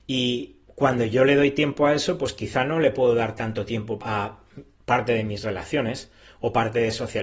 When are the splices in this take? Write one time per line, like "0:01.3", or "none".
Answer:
0:04.0